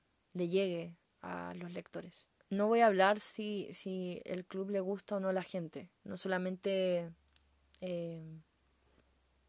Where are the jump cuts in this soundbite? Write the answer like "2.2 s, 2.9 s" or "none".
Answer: 2.4 s, 5.9 s

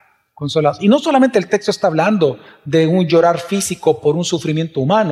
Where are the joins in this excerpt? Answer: none

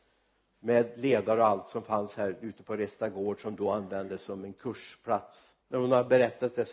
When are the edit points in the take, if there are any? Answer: 5.6 s

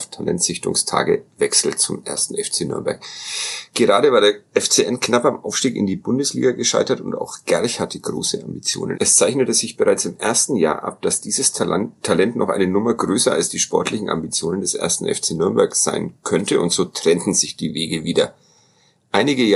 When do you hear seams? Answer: 8.9 s

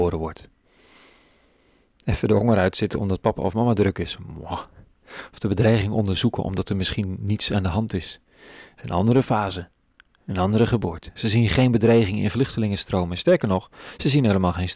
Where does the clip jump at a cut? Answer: 11.1 s

